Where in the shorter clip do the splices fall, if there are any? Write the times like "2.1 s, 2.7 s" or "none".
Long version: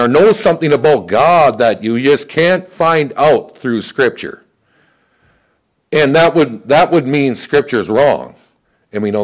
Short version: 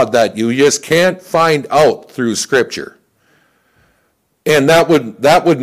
none